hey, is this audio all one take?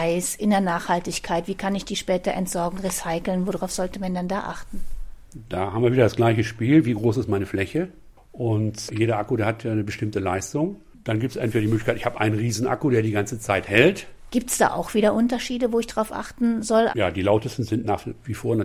no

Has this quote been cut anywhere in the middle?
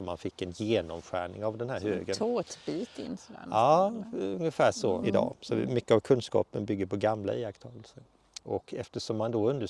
yes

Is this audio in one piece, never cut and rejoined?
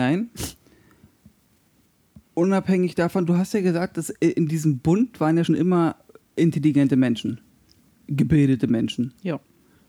no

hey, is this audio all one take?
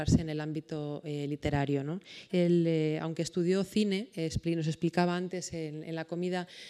no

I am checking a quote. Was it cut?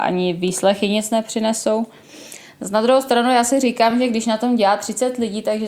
no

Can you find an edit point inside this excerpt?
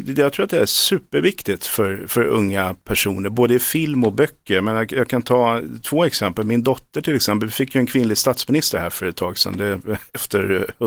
no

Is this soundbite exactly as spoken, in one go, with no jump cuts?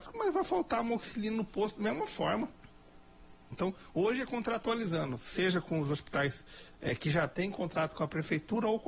no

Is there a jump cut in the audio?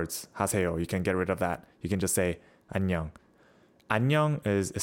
yes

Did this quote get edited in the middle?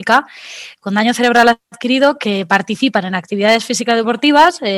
no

